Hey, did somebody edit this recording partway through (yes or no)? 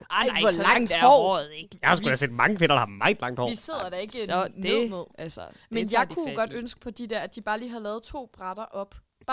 no